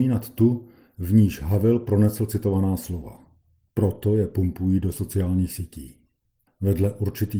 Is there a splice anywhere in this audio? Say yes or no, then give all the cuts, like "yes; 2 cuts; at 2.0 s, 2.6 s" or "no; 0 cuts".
yes; 1 cut; at 6.5 s